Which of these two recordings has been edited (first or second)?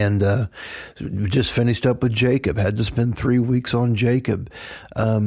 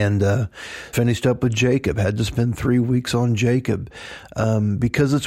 second